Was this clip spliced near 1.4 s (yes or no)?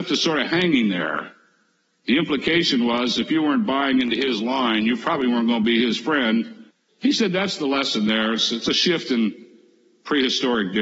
no